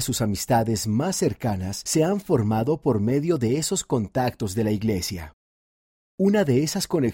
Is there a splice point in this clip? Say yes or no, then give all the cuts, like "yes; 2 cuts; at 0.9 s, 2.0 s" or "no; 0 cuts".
no; 0 cuts